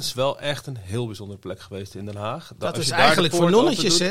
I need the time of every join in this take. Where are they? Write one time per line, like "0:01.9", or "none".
none